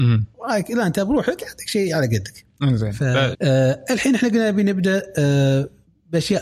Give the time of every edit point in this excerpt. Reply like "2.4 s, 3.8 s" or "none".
3.3 s